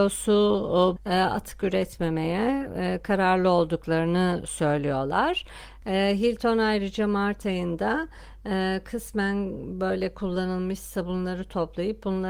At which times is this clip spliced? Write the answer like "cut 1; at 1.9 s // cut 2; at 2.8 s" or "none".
cut 1; at 1.0 s // cut 2; at 5.8 s